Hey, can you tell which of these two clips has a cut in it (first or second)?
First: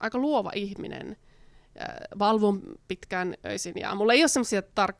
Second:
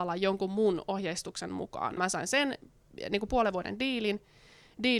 second